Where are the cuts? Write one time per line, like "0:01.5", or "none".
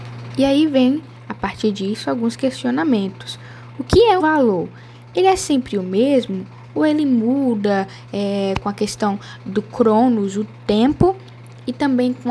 0:04.2